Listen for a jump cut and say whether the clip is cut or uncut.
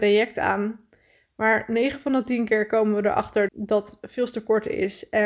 cut